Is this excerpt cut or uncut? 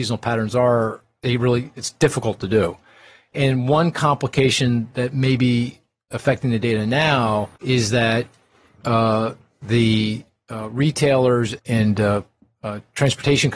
cut